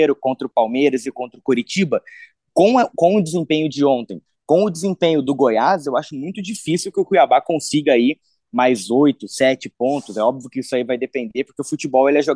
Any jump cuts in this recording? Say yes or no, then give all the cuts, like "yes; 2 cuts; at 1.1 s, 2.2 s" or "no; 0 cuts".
no; 0 cuts